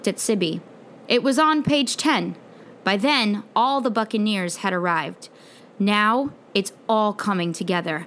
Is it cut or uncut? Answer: cut